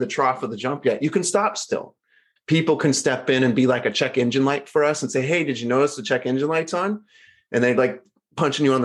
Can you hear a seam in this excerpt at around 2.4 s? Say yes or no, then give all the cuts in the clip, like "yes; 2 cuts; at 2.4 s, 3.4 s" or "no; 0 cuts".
yes; 1 cut; at 2.4 s